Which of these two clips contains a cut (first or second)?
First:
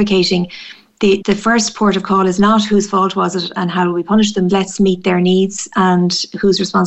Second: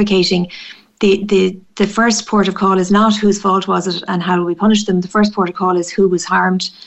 first